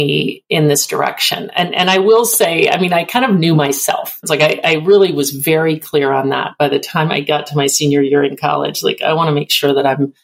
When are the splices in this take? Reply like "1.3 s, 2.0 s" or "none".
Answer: 4.2 s